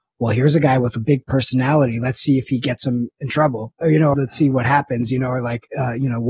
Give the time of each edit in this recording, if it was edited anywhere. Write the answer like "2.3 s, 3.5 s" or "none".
4.1 s